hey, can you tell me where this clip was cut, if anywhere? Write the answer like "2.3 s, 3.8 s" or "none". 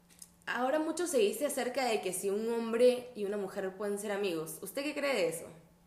none